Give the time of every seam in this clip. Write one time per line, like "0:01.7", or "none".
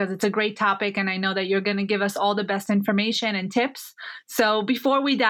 none